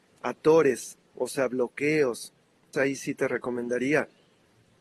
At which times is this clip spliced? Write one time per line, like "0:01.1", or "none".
0:02.7